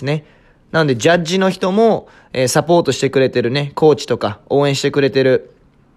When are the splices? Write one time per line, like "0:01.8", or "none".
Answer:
none